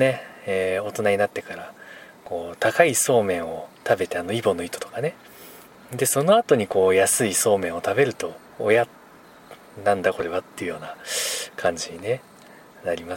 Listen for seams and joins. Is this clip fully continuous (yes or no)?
no